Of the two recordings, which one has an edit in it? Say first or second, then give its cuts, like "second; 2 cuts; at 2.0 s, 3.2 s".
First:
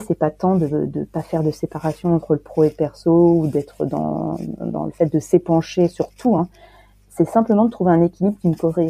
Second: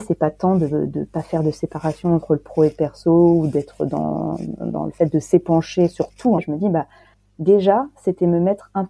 second; 1 cut; at 6.4 s